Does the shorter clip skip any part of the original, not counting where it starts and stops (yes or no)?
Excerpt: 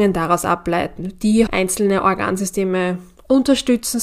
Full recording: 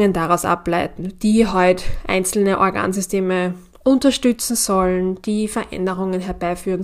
yes